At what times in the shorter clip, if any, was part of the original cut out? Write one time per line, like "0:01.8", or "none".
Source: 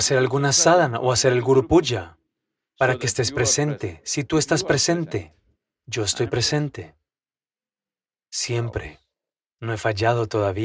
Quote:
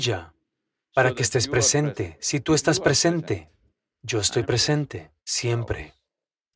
0:05.2